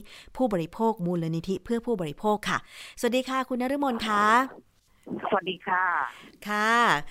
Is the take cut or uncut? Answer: uncut